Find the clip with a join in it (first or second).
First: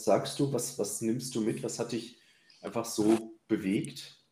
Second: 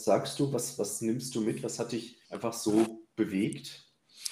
second